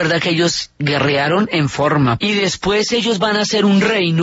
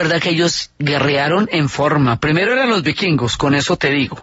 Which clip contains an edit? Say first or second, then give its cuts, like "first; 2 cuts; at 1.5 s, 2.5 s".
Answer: first; 1 cut; at 2.2 s